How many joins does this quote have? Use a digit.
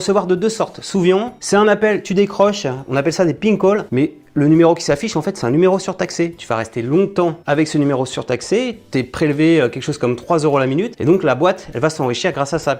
1